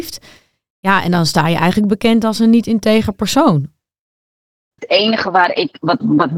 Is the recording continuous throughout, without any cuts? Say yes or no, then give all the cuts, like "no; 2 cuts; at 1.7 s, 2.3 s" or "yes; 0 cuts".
no; 1 cut; at 4.7 s